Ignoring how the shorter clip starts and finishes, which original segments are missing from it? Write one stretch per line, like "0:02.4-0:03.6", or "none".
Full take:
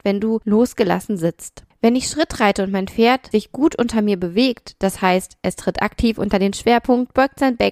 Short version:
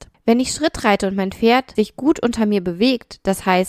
none